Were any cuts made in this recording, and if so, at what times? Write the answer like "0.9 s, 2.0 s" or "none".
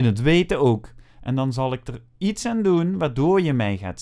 none